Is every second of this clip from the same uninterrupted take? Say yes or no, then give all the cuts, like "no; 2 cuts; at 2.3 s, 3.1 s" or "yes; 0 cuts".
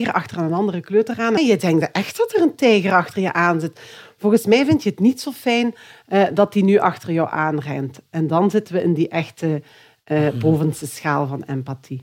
no; 1 cut; at 1.4 s